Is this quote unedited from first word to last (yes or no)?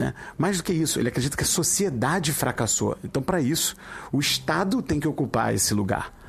yes